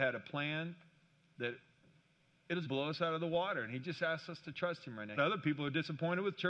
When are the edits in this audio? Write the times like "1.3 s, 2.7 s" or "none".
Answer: 2.6 s, 5.2 s